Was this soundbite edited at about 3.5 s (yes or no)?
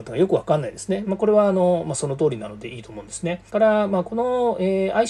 yes